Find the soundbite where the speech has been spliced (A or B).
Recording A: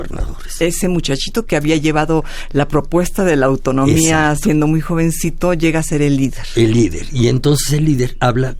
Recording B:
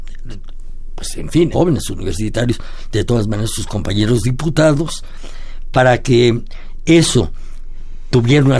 B